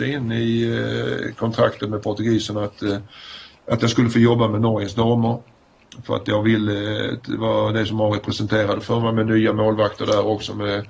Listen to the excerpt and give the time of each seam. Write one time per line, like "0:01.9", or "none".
0:07.2